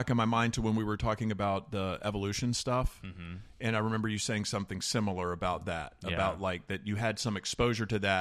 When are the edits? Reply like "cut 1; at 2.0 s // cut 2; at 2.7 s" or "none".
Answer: none